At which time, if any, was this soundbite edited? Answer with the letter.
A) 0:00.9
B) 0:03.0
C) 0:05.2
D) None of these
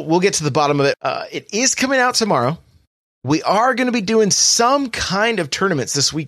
A